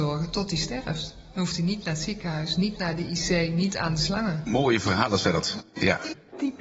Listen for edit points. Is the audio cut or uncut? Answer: uncut